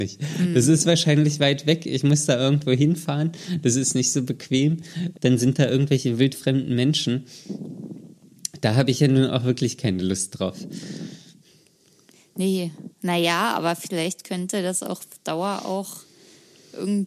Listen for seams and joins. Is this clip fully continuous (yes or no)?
no